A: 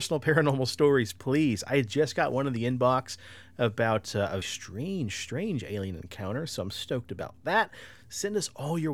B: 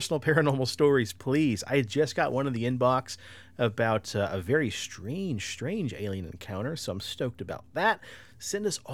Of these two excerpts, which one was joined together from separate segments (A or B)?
A